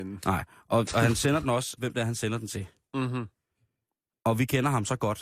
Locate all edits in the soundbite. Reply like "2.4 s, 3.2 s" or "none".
1.8 s

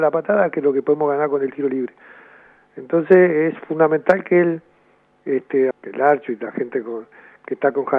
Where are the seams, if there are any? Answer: 5.7 s

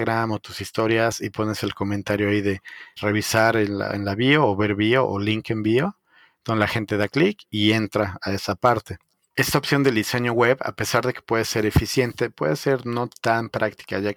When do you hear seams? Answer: 3.0 s

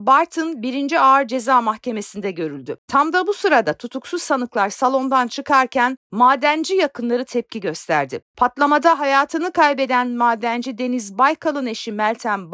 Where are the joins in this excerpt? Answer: 2.8 s

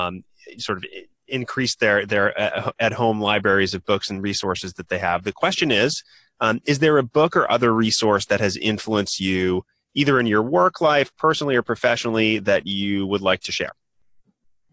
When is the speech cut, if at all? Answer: none

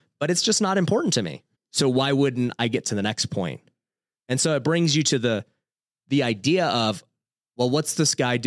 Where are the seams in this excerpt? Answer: 1.5 s

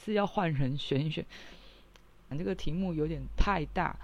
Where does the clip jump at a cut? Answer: 2.3 s

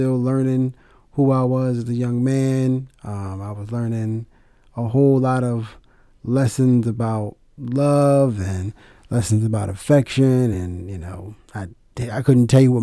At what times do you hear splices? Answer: none

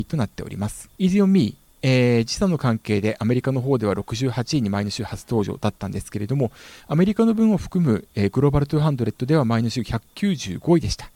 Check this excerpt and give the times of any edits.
0.9 s

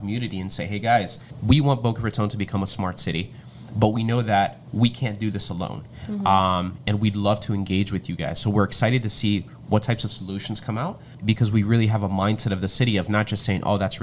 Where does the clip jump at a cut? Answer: none

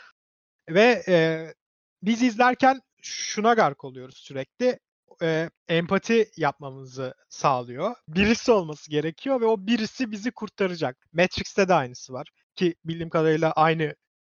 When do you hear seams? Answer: 5.6 s, 8.1 s, 11.0 s

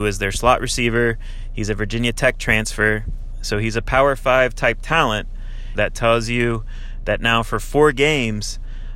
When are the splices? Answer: 5.7 s

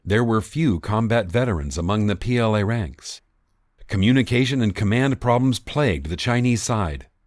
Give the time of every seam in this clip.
3.8 s

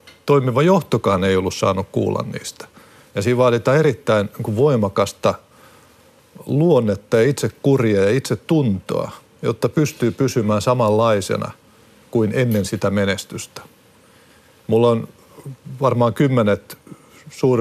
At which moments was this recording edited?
3.1 s

